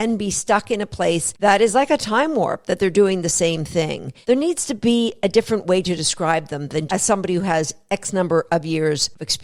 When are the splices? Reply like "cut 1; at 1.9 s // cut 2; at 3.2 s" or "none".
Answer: cut 1; at 4.2 s // cut 2; at 6.9 s

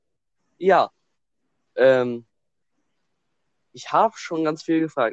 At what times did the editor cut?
none

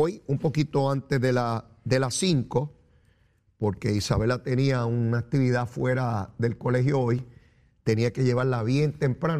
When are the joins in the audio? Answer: none

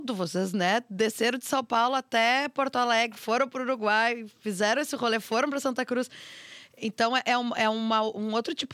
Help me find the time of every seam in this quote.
none

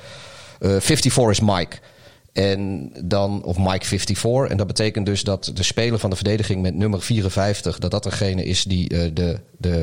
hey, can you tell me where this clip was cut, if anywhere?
none

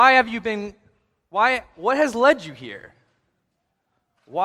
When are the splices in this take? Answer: none

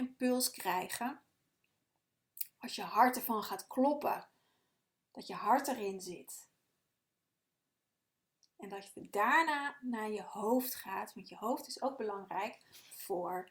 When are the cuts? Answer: none

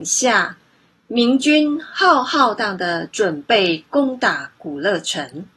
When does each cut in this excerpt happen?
cut 1; at 2.6 s

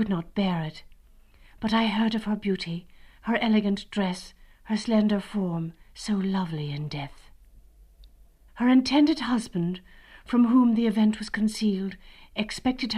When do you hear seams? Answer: cut 1; at 5.8 s // cut 2; at 8.5 s

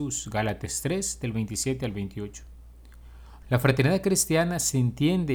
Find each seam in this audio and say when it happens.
cut 1; at 3.4 s

